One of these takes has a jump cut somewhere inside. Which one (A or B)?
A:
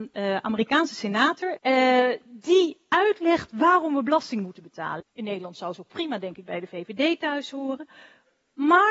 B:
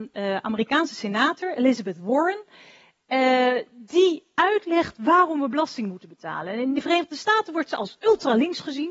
A